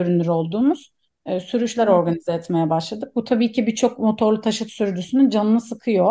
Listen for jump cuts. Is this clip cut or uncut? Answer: uncut